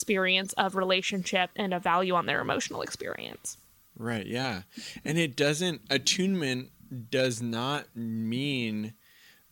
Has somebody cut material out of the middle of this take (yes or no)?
yes